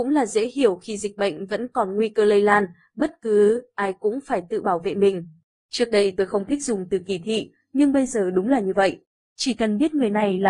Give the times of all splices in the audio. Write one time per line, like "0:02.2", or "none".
0:09.2